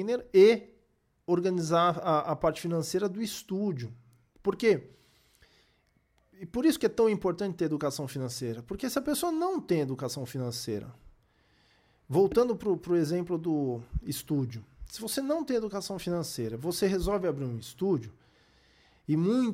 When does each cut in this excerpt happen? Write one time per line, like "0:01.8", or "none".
none